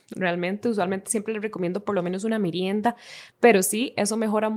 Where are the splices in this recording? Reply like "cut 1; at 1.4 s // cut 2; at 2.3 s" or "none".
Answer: cut 1; at 3.3 s